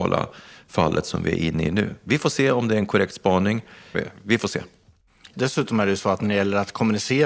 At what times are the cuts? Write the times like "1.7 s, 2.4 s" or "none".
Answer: 3.9 s, 5.3 s

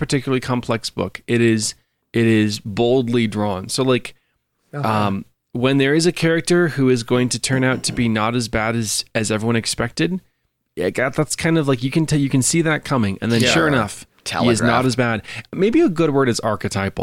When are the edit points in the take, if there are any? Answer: none

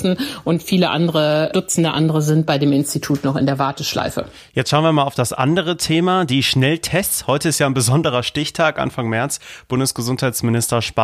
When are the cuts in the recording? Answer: none

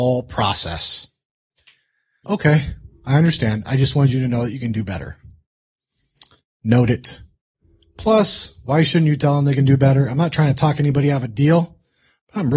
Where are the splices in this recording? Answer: 2.2 s

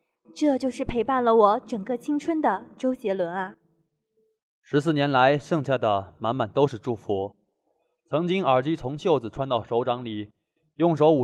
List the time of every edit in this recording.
none

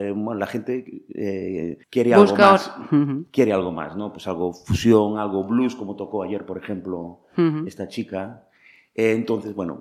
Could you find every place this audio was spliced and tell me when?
1.8 s

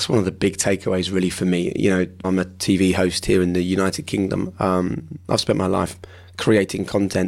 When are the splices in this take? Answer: 2.2 s

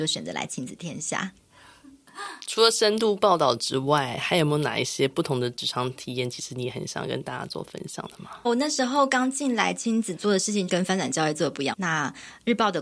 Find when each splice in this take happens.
8.4 s, 10.7 s, 11.7 s

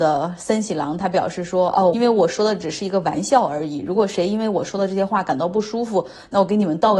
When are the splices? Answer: 1.9 s

